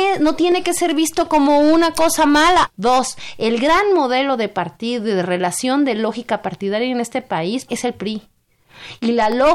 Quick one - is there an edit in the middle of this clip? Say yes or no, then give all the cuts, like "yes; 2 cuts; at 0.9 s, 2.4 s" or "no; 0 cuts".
yes; 2 cuts; at 2.7 s, 7.7 s